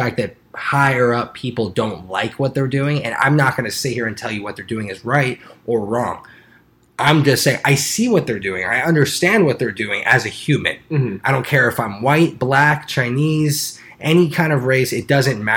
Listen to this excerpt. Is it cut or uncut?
uncut